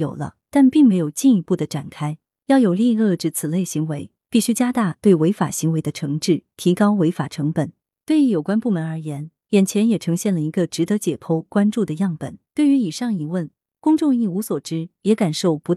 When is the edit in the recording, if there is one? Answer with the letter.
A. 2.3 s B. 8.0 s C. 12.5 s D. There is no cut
C